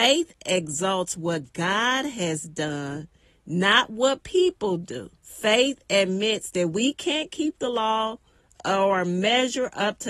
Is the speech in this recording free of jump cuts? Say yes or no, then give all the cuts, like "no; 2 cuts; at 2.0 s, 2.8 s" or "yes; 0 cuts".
no; 1 cut; at 5.2 s